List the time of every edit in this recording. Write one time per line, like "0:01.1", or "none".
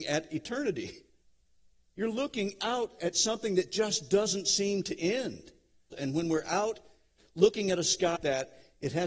0:05.9
0:08.2